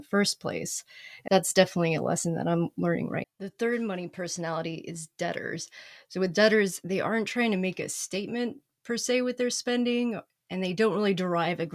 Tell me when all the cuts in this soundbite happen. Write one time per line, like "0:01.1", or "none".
0:01.3
0:03.2